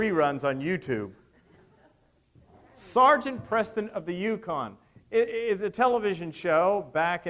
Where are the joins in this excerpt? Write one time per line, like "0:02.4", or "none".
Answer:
none